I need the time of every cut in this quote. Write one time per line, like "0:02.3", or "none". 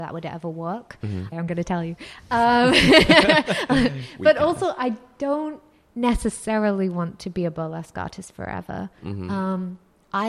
0:01.3